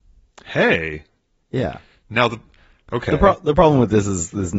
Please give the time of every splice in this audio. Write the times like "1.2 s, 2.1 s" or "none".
none